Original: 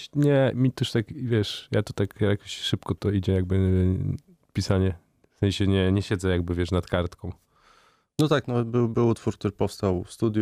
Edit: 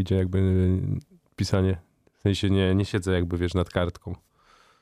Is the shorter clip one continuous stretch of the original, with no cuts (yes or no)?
yes